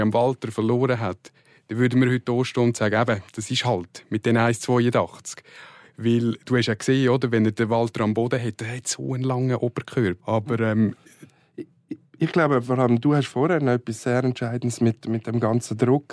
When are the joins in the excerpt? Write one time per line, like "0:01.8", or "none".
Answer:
0:10.2